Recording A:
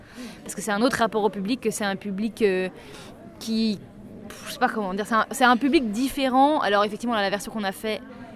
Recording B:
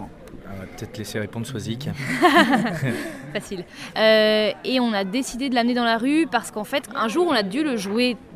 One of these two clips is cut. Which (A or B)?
B